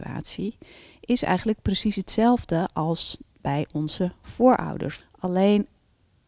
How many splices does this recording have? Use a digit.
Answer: 1